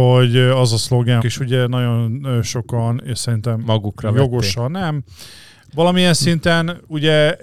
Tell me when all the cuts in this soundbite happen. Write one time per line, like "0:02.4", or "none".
0:01.2